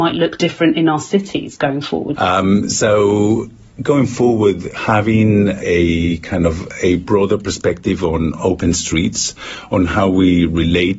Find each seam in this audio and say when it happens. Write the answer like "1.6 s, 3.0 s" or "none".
2.1 s